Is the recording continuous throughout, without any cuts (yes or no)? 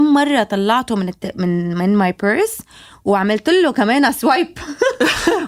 yes